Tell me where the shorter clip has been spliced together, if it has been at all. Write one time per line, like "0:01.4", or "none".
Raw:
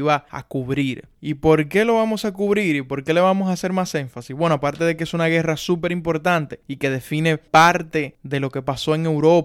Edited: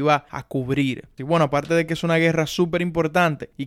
0:01.2